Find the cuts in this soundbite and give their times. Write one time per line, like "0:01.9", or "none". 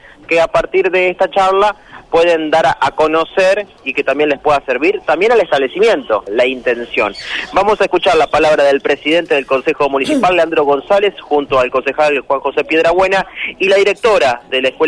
0:06.3